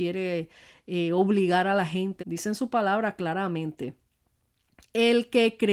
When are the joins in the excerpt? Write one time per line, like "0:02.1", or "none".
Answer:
0:02.2